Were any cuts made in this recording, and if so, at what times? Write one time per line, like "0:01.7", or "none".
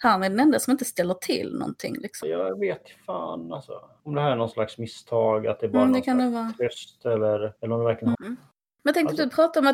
0:02.2
0:08.1